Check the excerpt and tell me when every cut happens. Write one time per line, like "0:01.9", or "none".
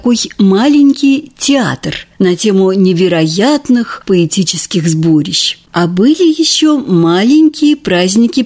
0:05.7